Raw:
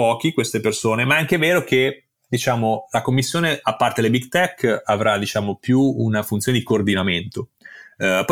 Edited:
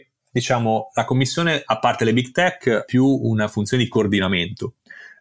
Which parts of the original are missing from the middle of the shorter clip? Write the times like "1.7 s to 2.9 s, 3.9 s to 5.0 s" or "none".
4.8 s to 5.6 s